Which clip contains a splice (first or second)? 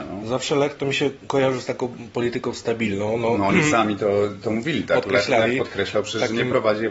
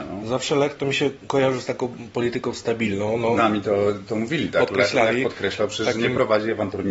second